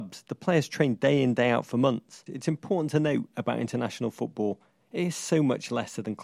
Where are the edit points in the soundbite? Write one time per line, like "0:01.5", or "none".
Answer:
0:02.3